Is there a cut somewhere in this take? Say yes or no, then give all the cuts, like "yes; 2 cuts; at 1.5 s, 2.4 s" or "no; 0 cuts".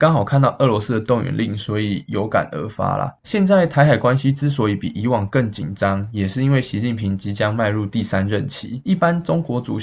no; 0 cuts